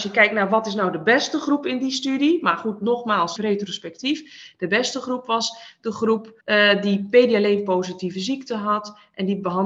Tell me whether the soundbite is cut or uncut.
cut